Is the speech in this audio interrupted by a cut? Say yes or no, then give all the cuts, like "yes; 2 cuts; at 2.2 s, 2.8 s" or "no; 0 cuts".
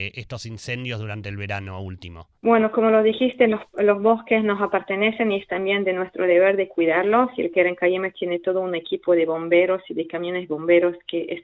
yes; 1 cut; at 2.4 s